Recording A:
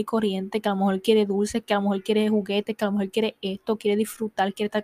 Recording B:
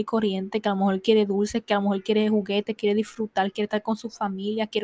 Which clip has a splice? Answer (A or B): B